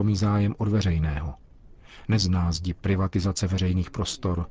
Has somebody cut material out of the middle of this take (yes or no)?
yes